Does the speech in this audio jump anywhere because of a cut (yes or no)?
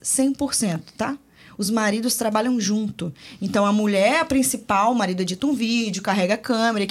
no